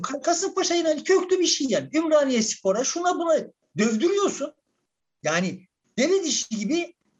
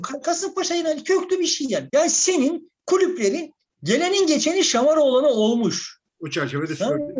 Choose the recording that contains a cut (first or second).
second